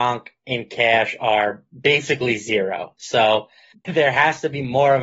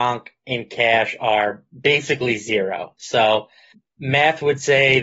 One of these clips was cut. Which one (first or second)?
first